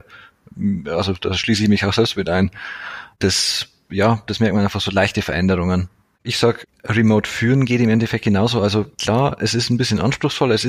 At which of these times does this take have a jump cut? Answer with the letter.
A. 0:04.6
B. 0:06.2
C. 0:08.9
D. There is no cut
C